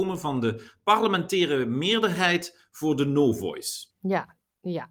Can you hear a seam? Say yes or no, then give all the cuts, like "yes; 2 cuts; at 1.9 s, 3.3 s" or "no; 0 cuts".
yes; 1 cut; at 3.9 s